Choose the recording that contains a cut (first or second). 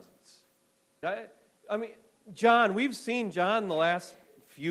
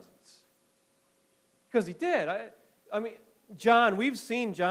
first